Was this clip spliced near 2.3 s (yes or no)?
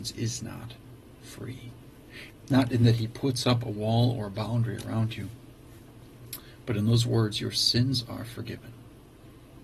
yes